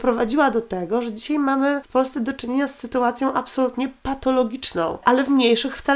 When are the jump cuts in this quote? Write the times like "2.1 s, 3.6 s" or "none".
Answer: 5.0 s

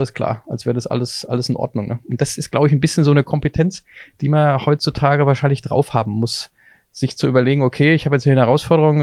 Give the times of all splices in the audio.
none

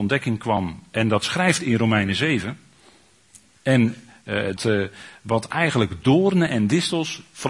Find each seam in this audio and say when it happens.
3.5 s, 4.6 s

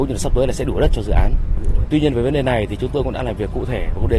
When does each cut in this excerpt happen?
1.8 s

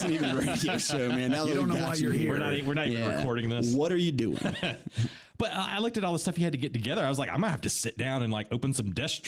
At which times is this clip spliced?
none

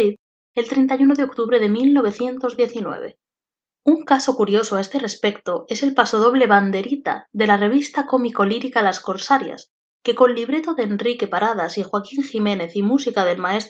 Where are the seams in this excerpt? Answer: 3.7 s

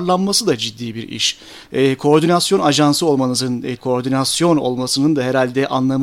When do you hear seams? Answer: 3.8 s

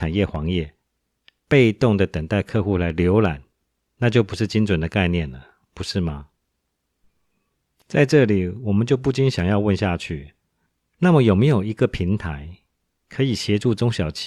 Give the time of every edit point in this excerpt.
none

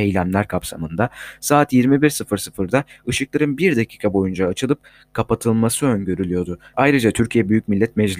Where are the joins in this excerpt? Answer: 6.7 s

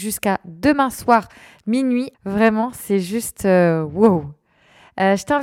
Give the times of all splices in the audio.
2.1 s

